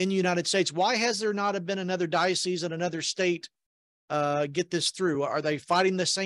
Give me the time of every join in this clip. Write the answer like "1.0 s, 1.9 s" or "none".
none